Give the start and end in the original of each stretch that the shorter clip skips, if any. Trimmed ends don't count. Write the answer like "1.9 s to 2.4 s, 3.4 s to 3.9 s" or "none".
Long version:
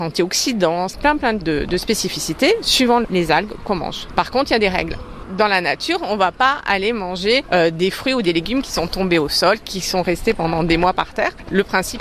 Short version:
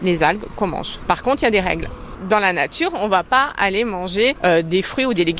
none

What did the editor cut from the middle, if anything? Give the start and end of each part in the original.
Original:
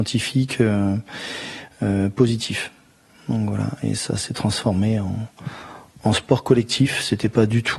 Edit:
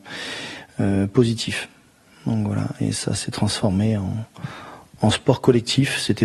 none

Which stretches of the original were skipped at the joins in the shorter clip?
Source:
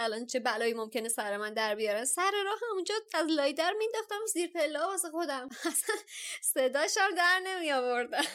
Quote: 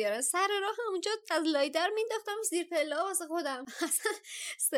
none

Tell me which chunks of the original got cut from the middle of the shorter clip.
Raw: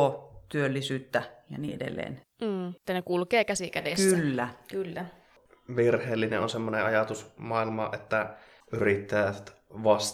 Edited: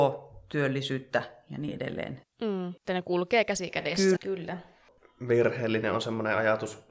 4.2 s to 4.6 s

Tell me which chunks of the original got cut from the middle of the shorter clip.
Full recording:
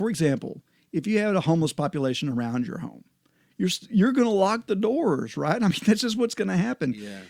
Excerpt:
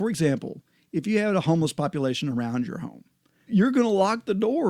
3.5 s to 3.9 s

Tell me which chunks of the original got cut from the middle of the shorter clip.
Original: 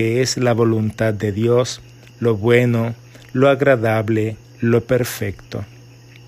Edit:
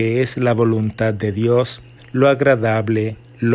2.0 s to 3.2 s

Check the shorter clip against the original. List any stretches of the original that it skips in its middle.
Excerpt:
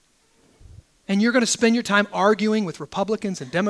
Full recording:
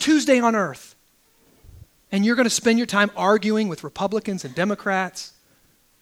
none

